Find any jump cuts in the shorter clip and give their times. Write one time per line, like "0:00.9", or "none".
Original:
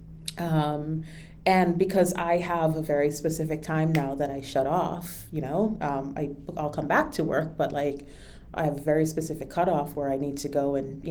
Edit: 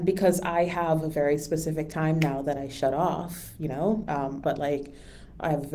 0:04.4